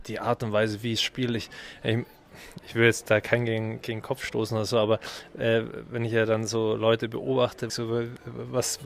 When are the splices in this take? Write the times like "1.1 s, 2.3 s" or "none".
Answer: 7.7 s